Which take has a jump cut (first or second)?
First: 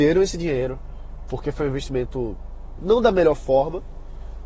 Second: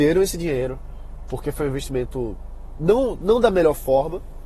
first